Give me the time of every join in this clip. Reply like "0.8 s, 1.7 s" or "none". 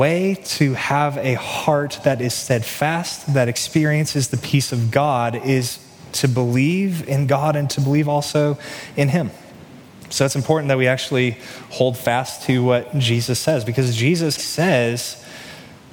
10.1 s, 14.4 s

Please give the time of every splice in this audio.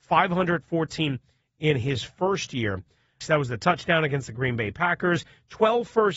3.2 s

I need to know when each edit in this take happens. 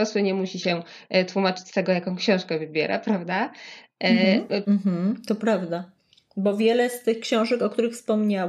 4.6 s

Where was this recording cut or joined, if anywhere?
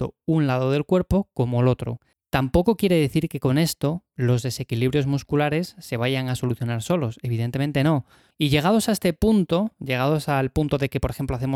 2.1 s, 8.3 s

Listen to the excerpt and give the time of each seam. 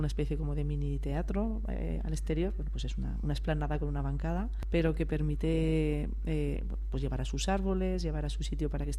none

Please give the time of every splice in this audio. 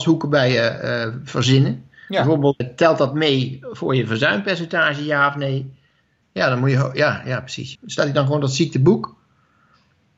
2.6 s, 6.2 s, 7.7 s

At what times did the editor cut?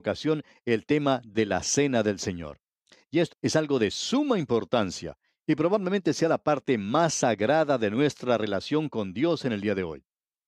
3.3 s

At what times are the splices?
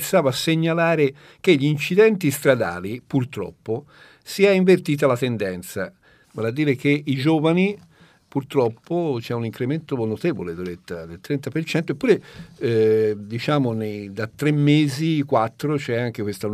6.2 s

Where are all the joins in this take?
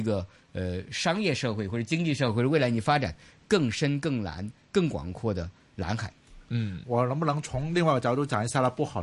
6.8 s

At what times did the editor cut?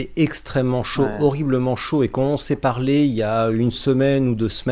none

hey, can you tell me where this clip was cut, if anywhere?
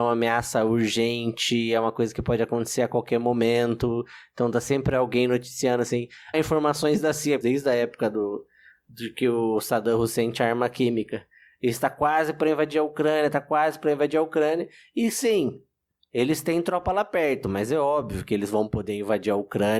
6.3 s, 7.4 s

